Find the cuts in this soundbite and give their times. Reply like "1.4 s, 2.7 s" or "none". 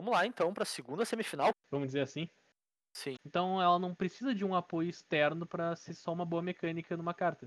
1.5 s, 3.2 s